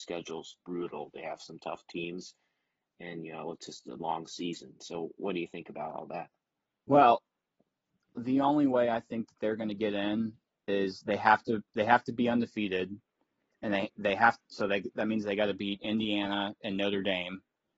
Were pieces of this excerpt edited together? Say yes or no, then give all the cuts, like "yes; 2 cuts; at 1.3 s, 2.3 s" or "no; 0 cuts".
no; 0 cuts